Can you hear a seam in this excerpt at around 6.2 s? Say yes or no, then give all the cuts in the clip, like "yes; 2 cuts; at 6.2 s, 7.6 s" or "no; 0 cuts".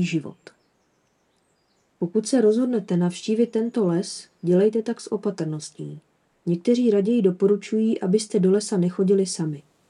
no; 0 cuts